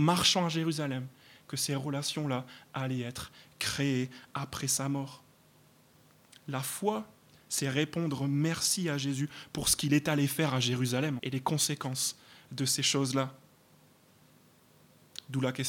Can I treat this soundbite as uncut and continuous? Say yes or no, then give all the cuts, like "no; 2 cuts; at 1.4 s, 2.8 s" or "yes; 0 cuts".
no; 1 cut; at 11.2 s